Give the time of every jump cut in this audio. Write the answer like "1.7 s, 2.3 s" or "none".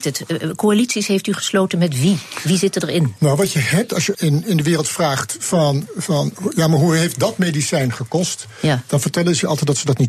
4.1 s